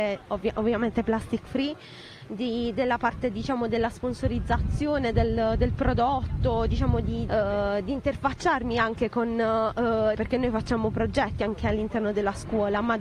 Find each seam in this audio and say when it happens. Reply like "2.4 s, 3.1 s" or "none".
7.3 s, 10.2 s